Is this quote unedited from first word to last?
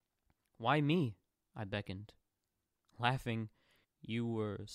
no; 1 cut; at 3.8 s

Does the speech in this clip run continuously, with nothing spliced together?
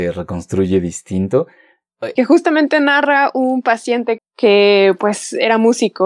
no; 2 cuts; at 2.2 s, 4.2 s

